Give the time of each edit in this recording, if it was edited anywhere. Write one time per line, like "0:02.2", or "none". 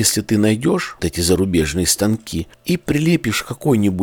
0:01.0